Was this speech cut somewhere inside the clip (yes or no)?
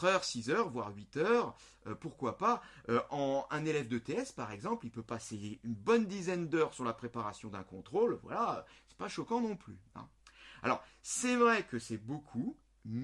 no